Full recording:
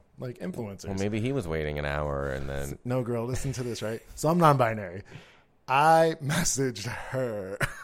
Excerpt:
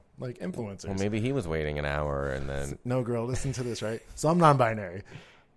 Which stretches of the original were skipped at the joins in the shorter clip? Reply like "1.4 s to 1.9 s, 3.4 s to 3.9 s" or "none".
none

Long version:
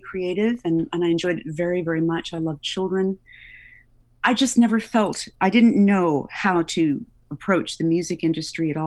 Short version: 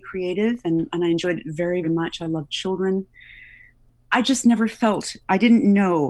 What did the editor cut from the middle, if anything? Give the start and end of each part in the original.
1.8 s to 2.0 s

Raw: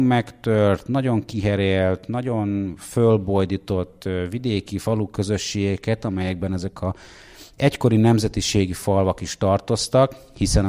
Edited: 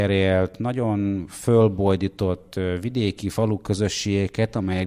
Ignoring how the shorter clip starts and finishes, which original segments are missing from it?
none

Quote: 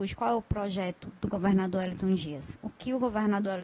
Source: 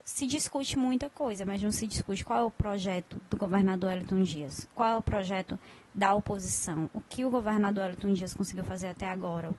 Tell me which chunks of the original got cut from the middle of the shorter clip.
4.7 s to 6.9 s

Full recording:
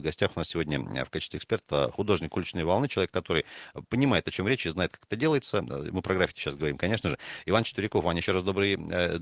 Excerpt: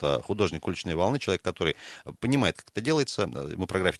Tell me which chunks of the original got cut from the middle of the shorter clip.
4.2 s to 4.9 s

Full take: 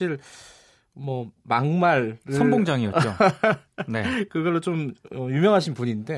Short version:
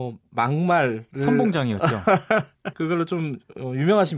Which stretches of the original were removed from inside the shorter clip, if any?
3.8 s to 4.3 s

